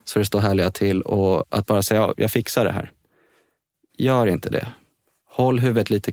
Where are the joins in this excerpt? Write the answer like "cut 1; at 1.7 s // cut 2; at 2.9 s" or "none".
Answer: cut 1; at 2.1 s